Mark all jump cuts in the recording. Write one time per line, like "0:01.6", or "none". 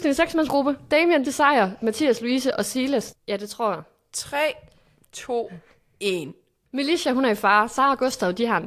0:01.2
0:03.1